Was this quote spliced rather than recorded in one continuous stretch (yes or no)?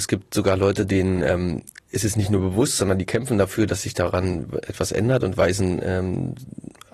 no